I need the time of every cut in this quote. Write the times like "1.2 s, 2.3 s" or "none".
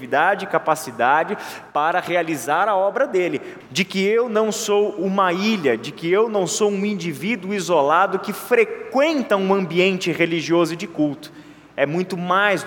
3.6 s